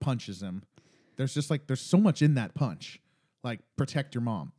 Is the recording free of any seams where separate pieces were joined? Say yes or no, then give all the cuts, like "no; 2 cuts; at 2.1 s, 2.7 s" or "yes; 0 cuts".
yes; 0 cuts